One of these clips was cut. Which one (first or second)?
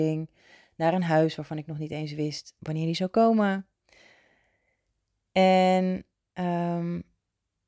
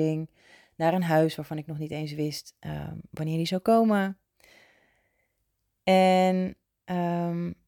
first